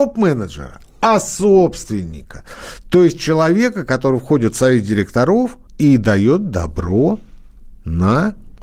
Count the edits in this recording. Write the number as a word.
one